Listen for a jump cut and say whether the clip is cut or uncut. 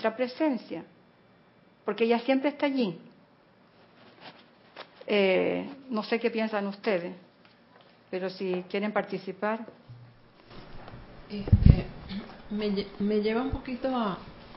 uncut